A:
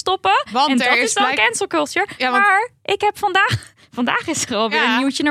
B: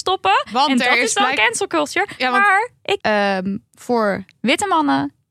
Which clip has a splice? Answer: B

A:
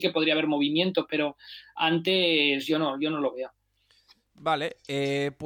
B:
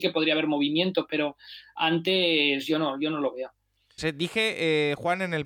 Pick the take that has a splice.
B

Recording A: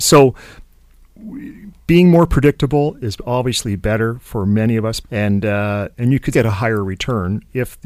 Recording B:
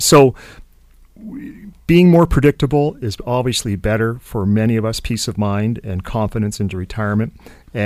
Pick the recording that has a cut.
A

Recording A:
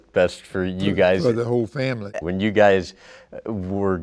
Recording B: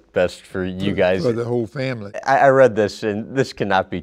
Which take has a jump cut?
A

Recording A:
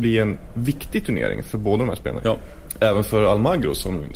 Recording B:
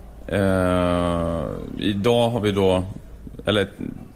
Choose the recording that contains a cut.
A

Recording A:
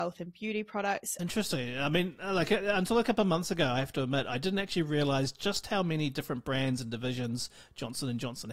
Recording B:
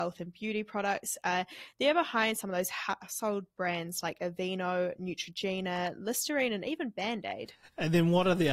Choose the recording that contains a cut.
A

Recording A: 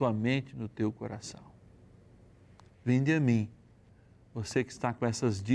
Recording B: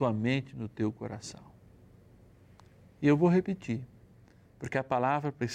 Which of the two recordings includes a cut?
A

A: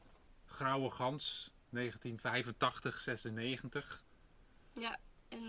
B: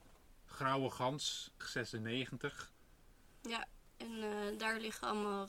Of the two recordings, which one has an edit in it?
B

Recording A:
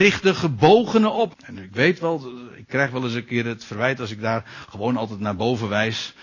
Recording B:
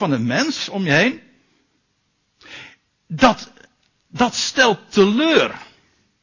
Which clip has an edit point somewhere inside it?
A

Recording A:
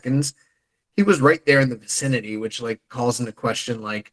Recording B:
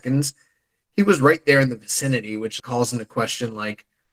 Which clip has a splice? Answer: B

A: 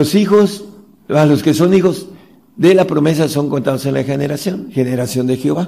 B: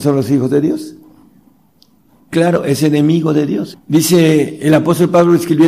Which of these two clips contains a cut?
B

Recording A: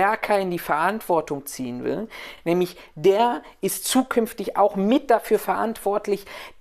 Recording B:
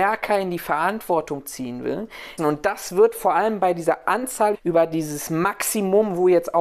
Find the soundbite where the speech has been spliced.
B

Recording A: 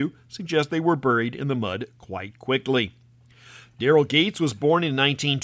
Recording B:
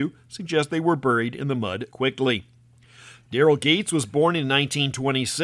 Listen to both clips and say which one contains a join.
B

